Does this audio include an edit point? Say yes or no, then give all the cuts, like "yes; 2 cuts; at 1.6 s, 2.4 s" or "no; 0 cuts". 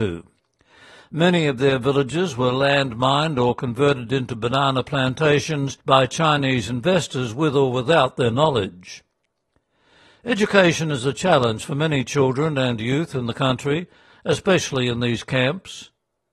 yes; 1 cut; at 5.8 s